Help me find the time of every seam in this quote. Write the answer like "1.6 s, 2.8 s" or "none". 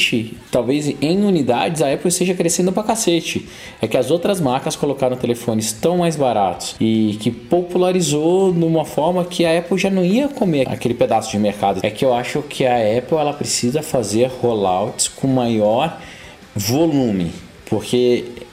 10.6 s, 11.8 s